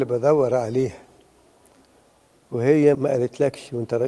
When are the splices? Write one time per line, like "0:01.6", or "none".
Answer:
0:02.9